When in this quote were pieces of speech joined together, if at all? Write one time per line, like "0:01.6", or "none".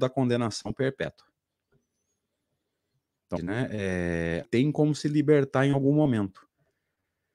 0:03.4
0:04.4